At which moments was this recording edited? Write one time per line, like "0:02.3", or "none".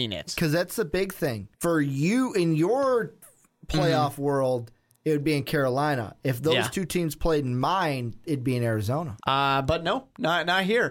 0:01.5
0:09.2